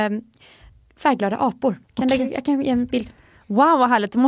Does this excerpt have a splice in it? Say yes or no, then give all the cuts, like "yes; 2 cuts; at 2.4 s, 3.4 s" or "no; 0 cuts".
yes; 1 cut; at 1.8 s